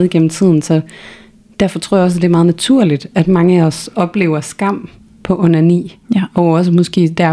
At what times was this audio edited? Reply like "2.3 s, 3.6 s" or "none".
none